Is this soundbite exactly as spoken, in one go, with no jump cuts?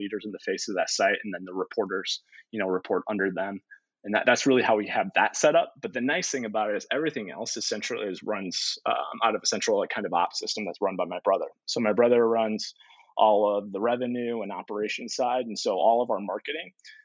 yes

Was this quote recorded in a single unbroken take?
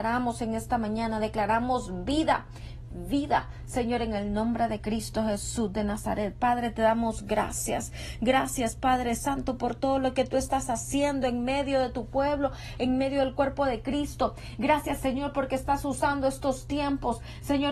yes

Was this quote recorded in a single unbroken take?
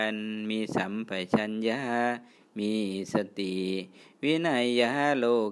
yes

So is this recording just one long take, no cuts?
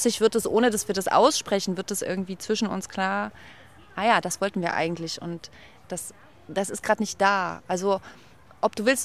yes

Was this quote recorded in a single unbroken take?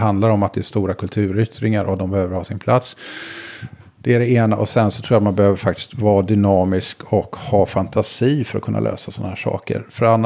yes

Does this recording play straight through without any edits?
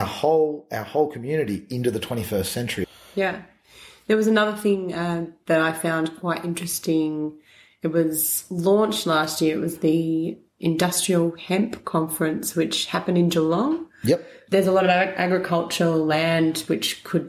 yes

